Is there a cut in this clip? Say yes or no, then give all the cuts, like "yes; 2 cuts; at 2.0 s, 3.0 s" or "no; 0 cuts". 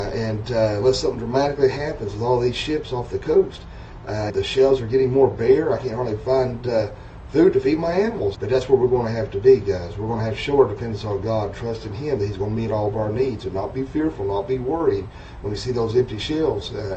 yes; 2 cuts; at 4.3 s, 8.3 s